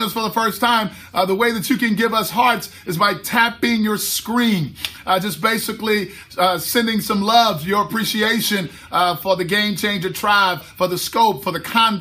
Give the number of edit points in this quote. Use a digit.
1